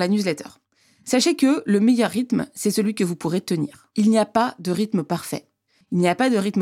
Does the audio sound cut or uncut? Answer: uncut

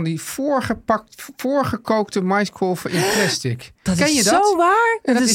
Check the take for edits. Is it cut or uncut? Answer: uncut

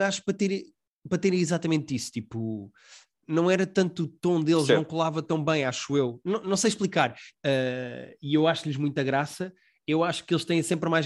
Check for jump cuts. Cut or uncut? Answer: cut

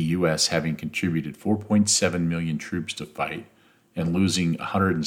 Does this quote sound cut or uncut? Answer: uncut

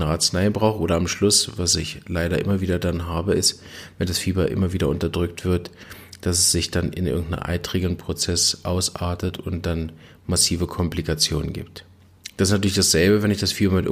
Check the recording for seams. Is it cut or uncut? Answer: uncut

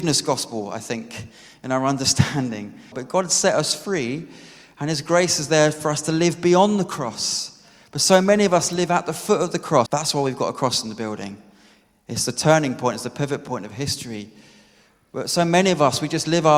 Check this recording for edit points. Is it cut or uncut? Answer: cut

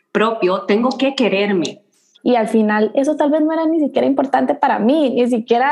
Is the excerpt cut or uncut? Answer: cut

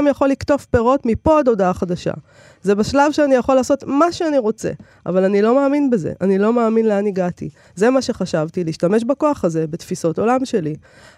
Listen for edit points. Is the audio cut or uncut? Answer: cut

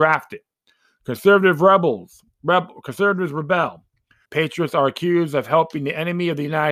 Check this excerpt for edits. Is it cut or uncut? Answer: cut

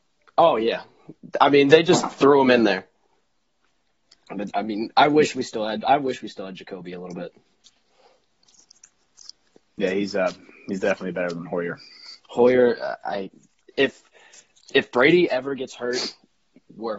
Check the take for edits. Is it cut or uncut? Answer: uncut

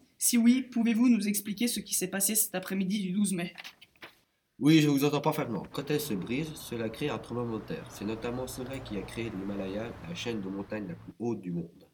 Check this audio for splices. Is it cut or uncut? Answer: cut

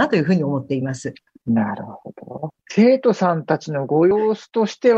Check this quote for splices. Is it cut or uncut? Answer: cut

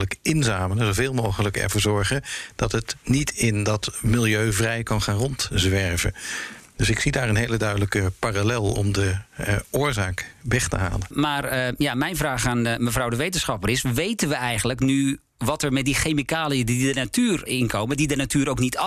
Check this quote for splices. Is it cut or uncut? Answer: cut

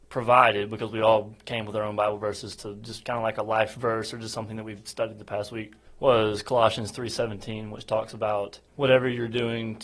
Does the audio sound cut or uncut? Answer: uncut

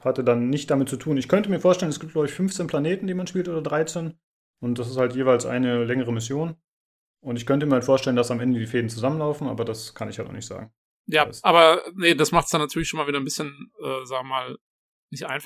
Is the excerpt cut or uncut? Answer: uncut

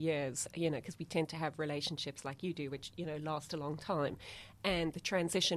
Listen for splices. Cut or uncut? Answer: uncut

